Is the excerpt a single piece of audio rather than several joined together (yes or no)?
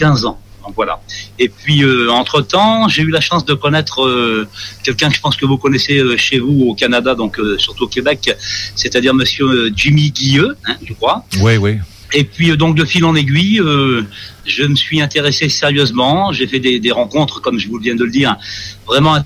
yes